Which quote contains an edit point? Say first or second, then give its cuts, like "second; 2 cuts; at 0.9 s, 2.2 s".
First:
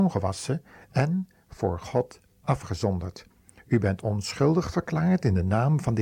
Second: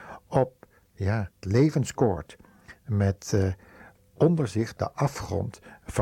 second; 1 cut; at 1.4 s